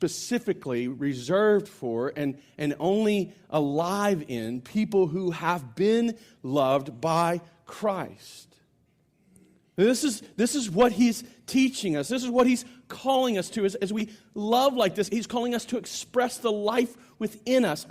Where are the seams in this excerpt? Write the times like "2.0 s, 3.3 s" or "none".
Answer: 15.1 s